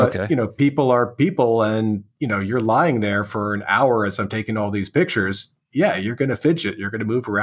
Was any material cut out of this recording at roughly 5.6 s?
no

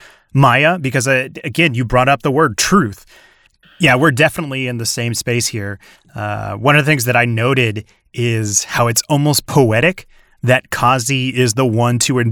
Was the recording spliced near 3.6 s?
yes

